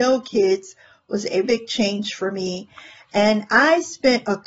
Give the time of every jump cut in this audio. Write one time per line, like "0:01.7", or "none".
0:01.4